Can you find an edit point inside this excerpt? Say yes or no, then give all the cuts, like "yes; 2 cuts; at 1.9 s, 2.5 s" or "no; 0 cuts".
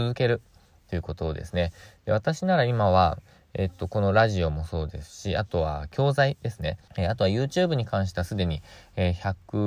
yes; 1 cut; at 6.9 s